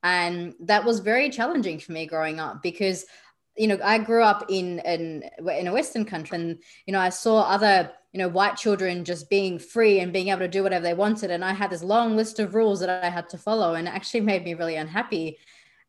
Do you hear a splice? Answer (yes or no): yes